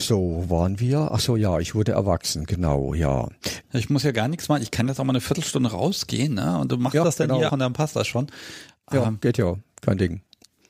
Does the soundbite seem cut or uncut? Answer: cut